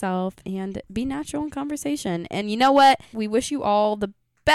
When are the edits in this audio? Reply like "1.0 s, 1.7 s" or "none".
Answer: 3.1 s